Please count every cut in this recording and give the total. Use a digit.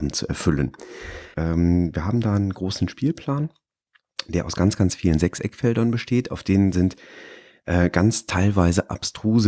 1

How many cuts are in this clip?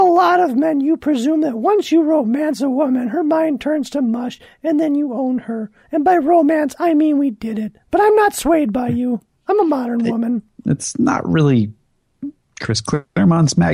1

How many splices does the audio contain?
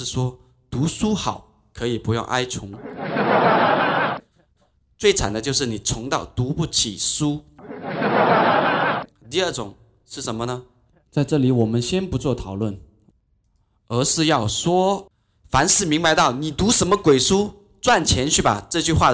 1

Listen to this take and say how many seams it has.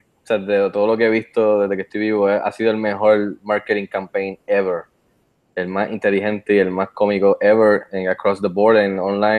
0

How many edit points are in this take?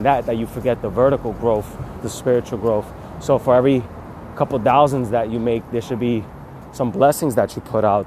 1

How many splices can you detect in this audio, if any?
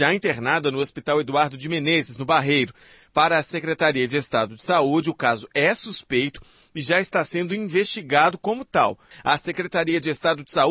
1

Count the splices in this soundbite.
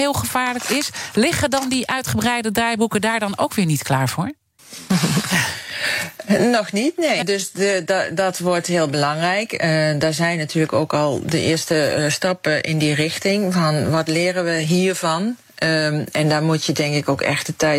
1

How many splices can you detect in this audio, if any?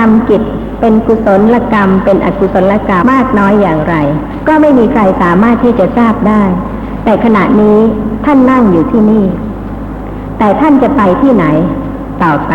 1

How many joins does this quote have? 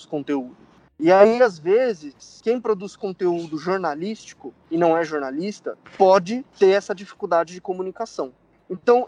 0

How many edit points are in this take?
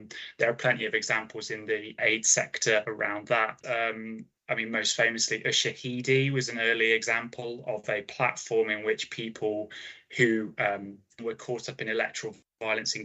2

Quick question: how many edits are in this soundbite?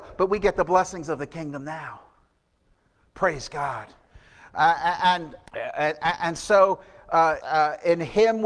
2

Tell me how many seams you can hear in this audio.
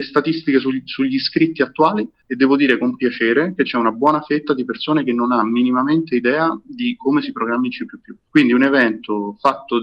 1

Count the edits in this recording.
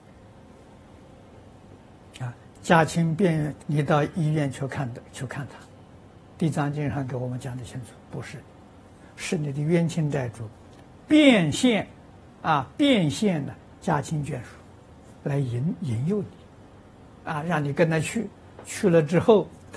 3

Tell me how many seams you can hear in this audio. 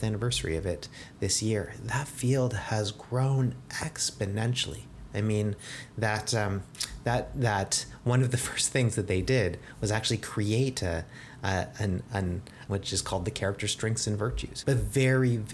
2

